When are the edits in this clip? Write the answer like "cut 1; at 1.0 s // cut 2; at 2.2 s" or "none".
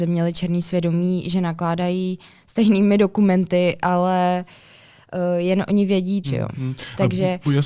cut 1; at 6.2 s